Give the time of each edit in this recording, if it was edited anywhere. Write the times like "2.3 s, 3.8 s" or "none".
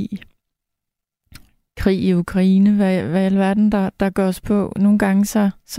none